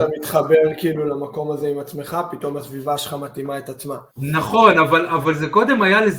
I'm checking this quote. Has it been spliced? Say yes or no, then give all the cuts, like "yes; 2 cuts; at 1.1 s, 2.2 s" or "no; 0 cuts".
yes; 1 cut; at 4.1 s